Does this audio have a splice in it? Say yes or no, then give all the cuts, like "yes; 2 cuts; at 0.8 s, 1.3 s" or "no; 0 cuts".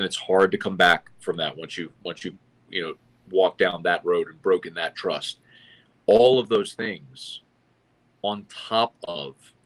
no; 0 cuts